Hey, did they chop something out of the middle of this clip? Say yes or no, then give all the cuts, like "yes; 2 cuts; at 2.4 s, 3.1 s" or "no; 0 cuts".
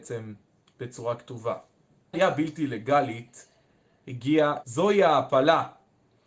yes; 2 cuts; at 2.1 s, 4.6 s